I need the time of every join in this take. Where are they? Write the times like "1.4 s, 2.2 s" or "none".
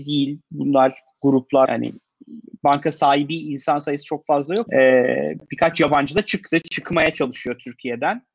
1.7 s, 4.7 s